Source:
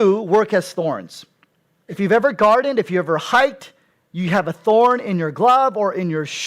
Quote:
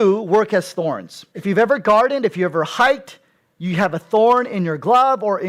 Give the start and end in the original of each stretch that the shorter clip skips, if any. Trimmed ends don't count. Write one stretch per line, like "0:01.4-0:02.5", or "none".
0:01.3-0:01.8